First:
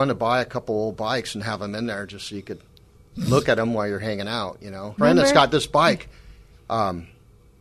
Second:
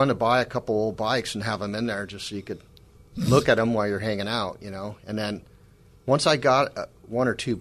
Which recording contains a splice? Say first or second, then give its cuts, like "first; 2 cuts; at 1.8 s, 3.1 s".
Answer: first; 2 cuts; at 5.0 s, 6.5 s